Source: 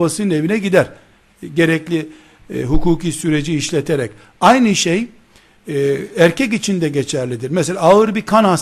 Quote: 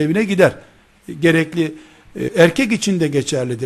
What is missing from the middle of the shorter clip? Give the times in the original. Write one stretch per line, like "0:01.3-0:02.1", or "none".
0:02.6-0:06.1

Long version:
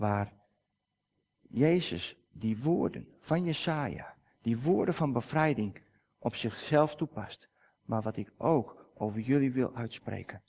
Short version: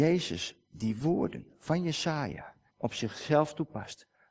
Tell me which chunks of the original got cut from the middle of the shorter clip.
0:04.3-0:06.1

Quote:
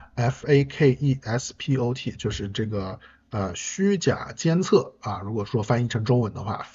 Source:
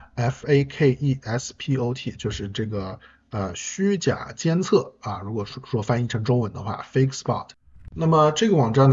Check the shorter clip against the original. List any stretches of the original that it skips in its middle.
0:05.5-0:05.7

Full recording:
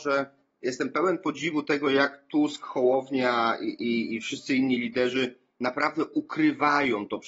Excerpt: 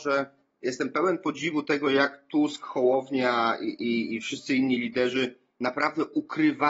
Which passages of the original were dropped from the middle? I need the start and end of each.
none

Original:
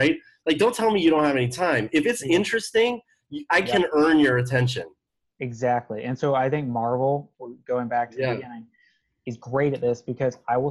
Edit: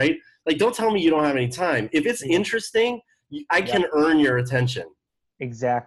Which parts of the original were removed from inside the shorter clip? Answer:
none

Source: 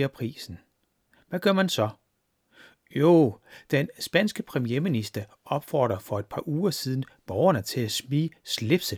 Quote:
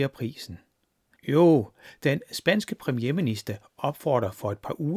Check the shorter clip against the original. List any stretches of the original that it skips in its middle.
0:01.2-0:02.8

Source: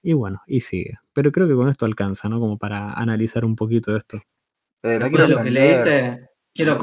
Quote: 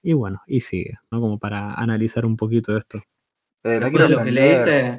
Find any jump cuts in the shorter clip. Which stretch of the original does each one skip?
0:01.1-0:02.3

